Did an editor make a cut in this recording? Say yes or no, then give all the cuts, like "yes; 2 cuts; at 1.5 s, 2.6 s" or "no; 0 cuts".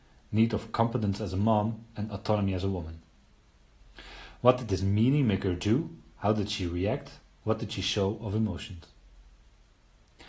no; 0 cuts